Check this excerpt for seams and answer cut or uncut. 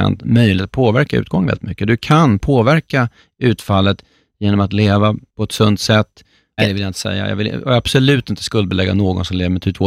cut